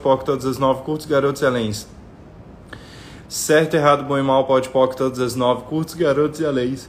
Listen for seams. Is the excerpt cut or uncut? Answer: cut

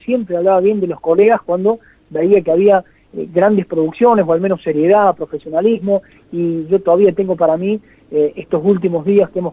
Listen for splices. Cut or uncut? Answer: uncut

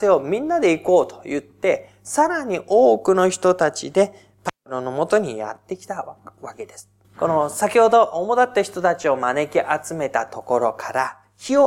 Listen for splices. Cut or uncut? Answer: cut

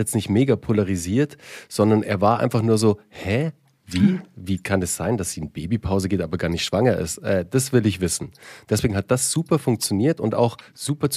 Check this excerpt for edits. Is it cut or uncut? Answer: uncut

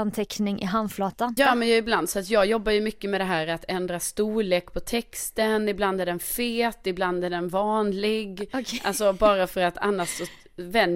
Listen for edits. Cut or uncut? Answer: cut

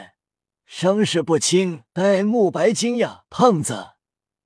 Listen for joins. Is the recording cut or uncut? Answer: cut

